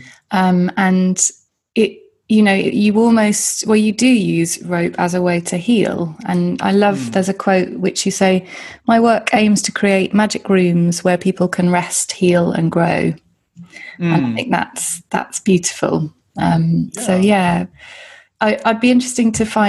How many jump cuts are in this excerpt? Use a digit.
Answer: 0